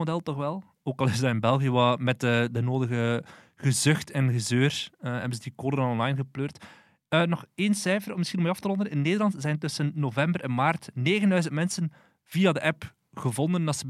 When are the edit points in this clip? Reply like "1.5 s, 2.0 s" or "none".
none

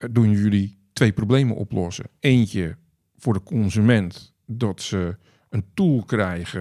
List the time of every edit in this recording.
none

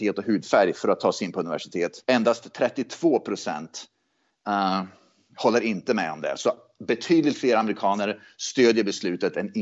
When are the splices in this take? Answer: 2.0 s

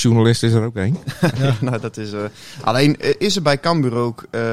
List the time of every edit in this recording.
none

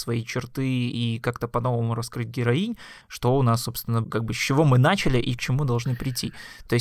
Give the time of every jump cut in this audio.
3.0 s, 4.0 s

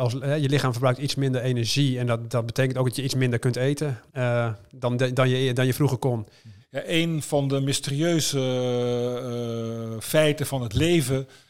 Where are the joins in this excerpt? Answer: 4.1 s, 6.6 s

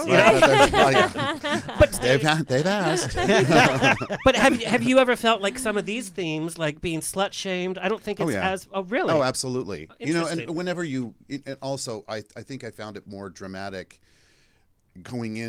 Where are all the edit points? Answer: none

